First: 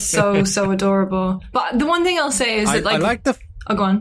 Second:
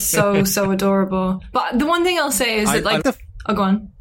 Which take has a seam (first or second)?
second